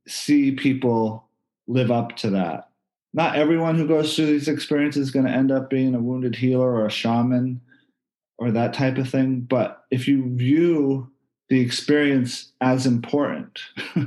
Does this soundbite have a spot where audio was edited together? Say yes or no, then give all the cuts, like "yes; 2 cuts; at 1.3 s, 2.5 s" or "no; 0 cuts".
yes; 1 cut; at 2.9 s